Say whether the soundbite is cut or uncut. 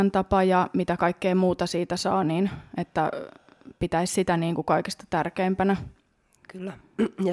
uncut